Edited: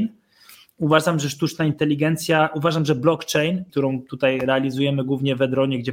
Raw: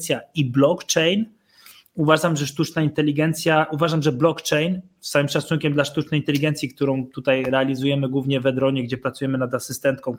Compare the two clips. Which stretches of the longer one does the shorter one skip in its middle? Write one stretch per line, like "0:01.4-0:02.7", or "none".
0:04.9-0:06.7